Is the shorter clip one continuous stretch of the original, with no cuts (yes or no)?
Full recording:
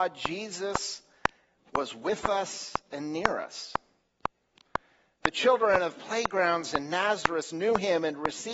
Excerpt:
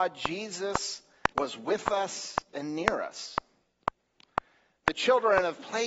no